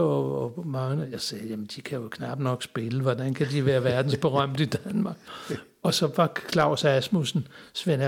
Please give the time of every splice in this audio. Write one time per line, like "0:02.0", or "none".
none